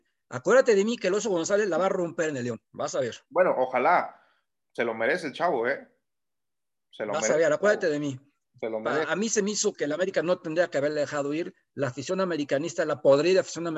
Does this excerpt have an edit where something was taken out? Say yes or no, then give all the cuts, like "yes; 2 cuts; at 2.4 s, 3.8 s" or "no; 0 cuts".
no; 0 cuts